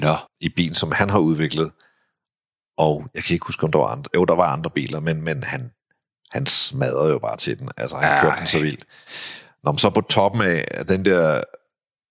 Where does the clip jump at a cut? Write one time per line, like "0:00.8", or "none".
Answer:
none

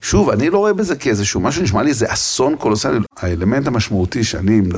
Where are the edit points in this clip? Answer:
0:03.1

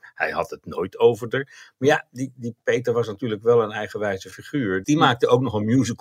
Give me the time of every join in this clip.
0:04.8

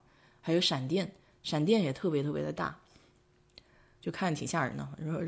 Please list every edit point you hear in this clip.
none

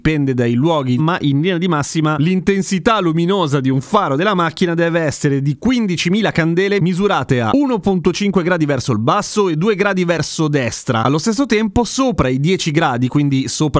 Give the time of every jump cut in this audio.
0:01.0

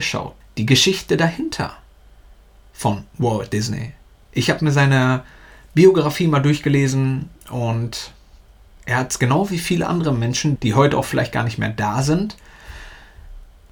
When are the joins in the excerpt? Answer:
0:04.2
0:10.6

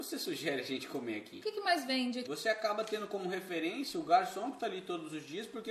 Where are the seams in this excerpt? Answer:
0:02.2

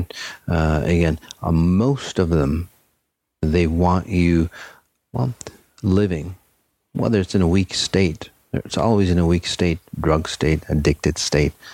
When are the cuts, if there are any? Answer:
none

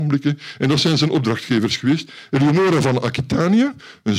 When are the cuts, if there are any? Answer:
0:02.3

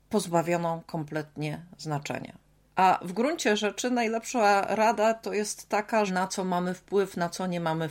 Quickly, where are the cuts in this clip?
0:02.6
0:06.1

